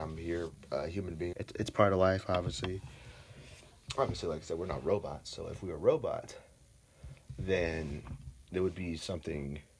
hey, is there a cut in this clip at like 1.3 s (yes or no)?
yes